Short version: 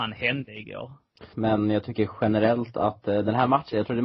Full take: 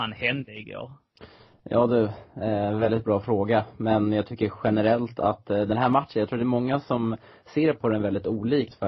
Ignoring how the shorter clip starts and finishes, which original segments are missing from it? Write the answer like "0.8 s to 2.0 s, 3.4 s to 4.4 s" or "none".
1.3 s to 3.8 s

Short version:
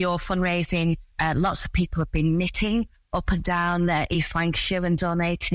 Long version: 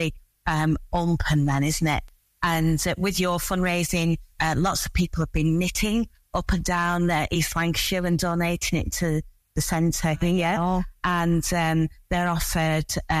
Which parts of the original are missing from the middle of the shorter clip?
none

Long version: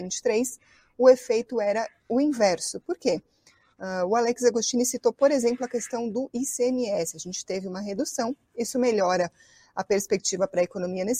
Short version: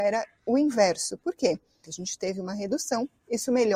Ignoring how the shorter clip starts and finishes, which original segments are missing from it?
3.5 s to 7.1 s

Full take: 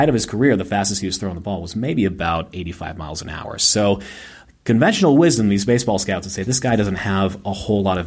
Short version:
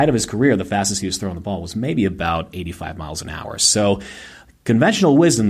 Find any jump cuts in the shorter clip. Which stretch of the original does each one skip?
none

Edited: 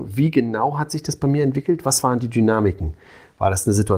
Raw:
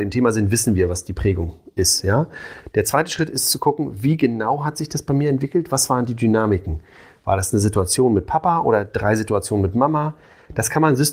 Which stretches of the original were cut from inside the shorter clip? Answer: none

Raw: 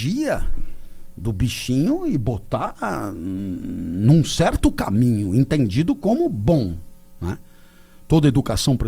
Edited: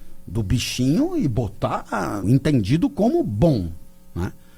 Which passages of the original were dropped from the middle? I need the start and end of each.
3.1 s to 5.3 s

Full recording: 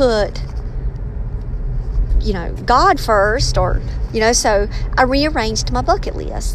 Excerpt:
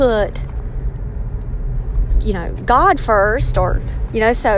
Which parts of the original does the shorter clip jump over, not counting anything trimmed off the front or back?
none

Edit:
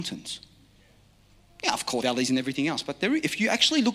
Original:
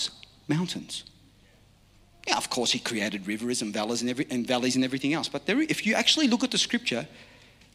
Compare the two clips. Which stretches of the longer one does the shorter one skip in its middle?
2.6 s to 4.5 s

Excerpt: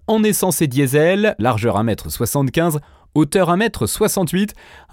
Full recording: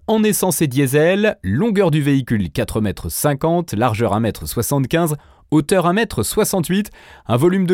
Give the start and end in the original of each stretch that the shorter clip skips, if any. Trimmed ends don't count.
1.4 s to 3.8 s

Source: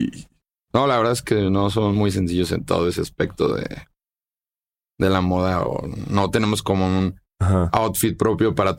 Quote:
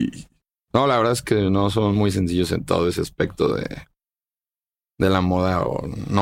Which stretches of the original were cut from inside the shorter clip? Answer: none

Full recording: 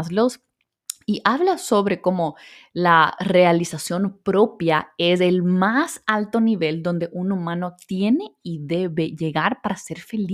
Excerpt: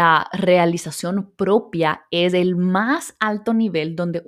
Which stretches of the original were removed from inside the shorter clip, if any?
none

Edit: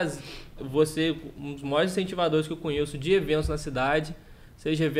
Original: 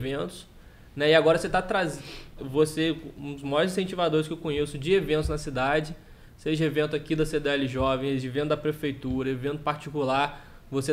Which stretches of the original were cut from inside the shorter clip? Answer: none

